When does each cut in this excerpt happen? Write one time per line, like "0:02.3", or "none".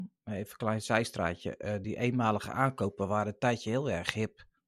none